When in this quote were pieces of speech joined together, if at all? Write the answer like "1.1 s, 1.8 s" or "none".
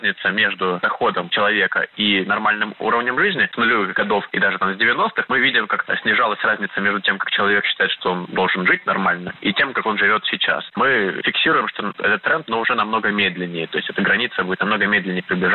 10.7 s, 12.5 s